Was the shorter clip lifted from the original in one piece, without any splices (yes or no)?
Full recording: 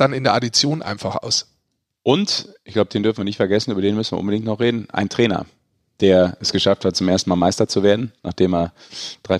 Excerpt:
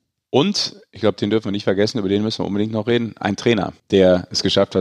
no